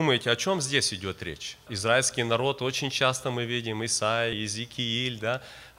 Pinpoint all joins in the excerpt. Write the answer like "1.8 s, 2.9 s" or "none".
1.7 s, 4.3 s